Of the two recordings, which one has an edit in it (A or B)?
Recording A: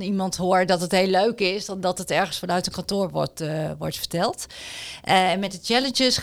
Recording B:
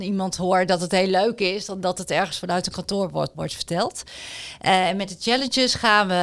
B